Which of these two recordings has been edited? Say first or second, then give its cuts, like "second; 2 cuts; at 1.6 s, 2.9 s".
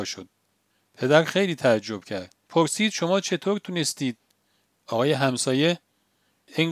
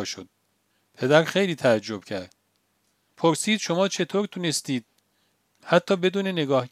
first; 2 cuts; at 2.4 s, 4.7 s